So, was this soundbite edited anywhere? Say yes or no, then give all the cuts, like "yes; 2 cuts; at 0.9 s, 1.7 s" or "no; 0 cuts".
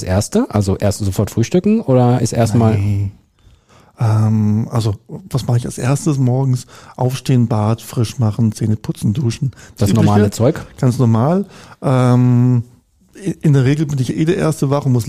no; 0 cuts